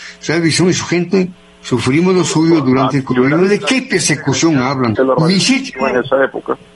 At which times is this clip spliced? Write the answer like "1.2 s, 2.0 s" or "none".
5.0 s